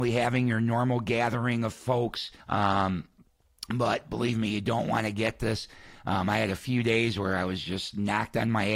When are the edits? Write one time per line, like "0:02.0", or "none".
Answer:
0:02.4